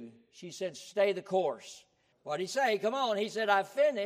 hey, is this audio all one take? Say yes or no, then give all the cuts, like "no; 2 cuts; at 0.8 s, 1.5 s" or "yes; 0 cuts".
no; 1 cut; at 2.1 s